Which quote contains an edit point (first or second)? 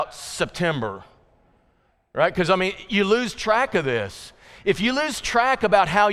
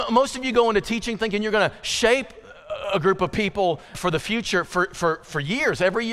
second